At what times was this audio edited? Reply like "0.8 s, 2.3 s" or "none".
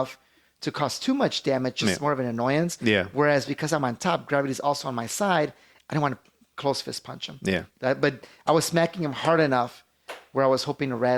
none